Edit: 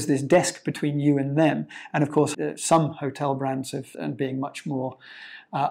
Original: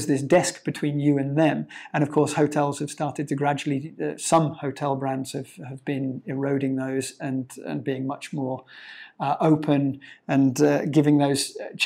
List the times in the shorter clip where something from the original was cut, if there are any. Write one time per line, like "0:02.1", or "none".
0:02.3
0:03.9